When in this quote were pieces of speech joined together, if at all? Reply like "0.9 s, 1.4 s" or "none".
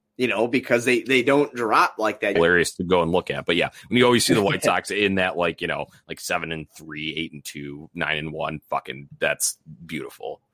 2.4 s